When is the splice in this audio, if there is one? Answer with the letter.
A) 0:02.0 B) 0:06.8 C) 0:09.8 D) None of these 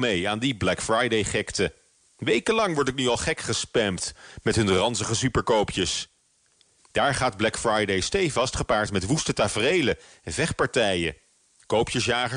B